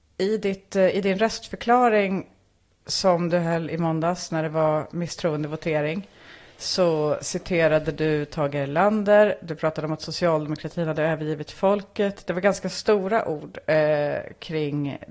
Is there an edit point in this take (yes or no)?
no